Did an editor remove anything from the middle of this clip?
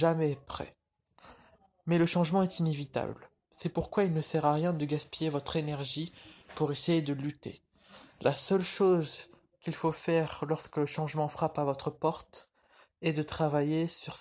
no; 0 cuts

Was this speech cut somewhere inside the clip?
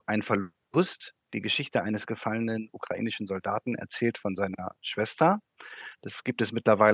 no; 0 cuts

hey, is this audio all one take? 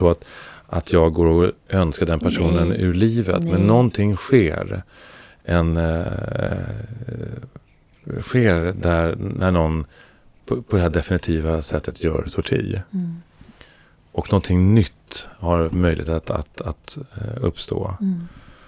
yes; 0 cuts

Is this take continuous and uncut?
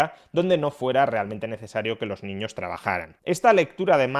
yes; 0 cuts

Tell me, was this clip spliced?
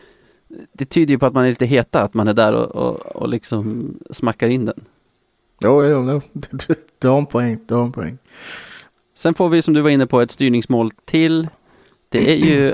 no; 0 cuts

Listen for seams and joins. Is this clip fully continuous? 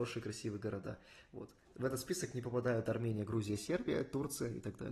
yes; 0 cuts

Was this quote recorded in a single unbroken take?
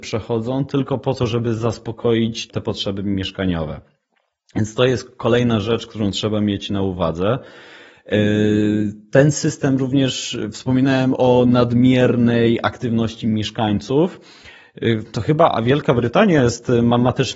no; 1 cut; at 2.5 s

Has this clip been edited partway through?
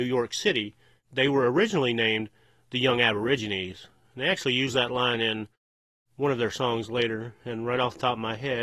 no; 0 cuts

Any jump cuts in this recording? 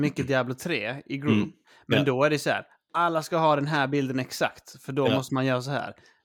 no; 0 cuts

